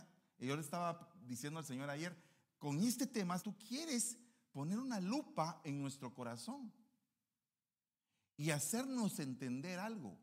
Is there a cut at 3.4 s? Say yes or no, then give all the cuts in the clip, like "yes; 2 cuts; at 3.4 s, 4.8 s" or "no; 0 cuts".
yes; 1 cut; at 3.4 s